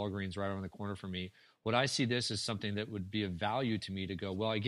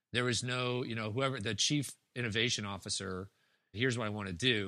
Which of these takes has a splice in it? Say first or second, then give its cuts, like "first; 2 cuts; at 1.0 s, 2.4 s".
second; 1 cut; at 3.7 s